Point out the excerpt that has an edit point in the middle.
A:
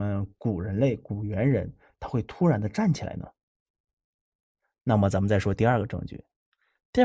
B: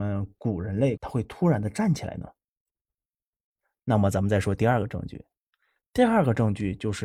B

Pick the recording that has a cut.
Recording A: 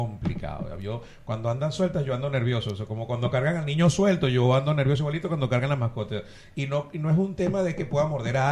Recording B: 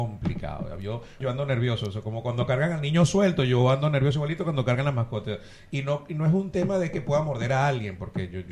B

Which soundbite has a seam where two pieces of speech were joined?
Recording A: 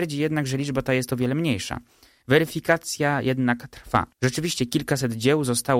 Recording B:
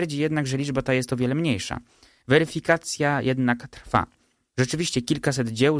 A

